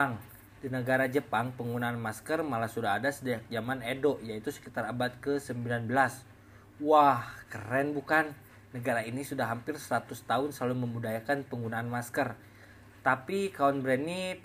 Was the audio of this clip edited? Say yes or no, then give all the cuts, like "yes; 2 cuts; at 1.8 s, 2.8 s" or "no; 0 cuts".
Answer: no; 0 cuts